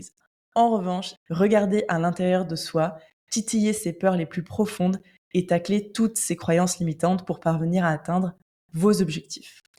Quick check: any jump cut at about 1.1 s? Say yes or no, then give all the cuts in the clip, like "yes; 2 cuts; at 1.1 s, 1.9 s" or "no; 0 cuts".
yes; 1 cut; at 1.1 s